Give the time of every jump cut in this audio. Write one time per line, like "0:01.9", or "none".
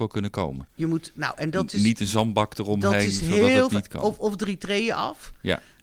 none